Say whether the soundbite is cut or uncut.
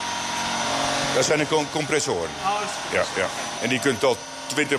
cut